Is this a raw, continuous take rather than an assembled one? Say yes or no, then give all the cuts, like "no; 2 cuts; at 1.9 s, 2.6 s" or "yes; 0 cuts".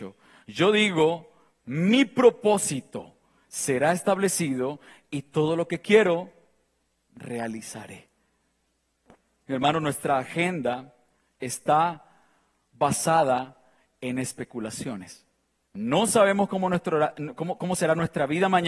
no; 2 cuts; at 9.5 s, 15.6 s